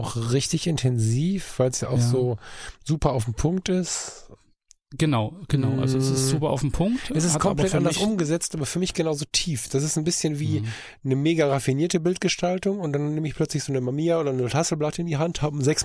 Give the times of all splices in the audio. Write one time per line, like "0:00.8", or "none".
none